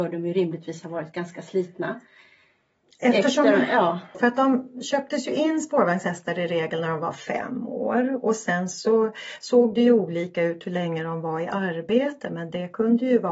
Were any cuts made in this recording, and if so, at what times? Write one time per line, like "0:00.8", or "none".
0:04.1